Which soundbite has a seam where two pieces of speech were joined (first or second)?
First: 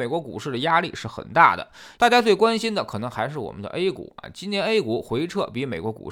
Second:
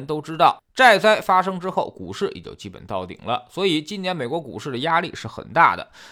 first